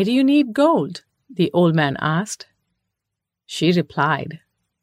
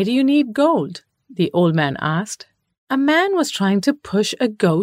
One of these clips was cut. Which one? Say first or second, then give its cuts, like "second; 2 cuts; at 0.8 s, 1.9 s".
second; 1 cut; at 2.7 s